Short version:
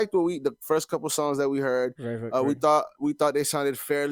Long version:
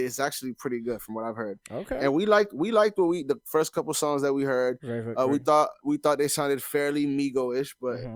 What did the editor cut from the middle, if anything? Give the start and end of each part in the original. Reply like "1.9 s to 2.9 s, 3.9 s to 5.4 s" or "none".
none